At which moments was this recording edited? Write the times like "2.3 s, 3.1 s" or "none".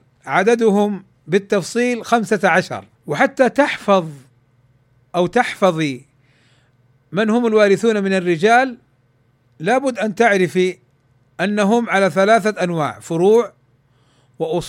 2.9 s